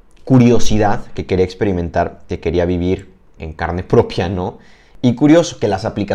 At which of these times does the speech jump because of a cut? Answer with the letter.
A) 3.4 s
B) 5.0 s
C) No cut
A